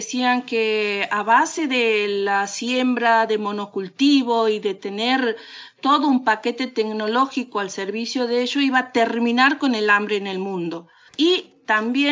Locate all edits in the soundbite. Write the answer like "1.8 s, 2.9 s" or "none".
11.1 s